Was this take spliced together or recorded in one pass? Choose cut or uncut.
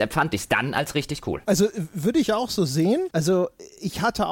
cut